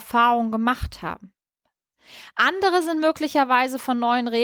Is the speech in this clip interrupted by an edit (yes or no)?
no